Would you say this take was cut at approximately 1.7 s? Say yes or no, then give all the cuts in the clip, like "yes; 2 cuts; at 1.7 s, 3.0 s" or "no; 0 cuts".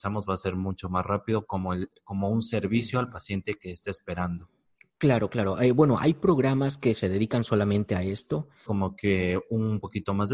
no; 1 cut; at 8.7 s